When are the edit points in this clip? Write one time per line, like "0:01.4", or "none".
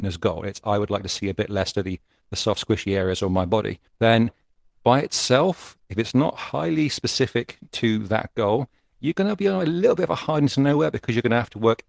0:03.9